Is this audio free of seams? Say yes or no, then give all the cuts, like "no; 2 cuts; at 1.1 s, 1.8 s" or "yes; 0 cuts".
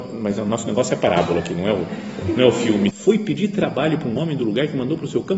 no; 1 cut; at 2.9 s